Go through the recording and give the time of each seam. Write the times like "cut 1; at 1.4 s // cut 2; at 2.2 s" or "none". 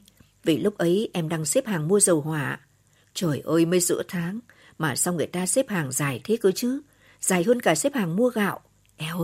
none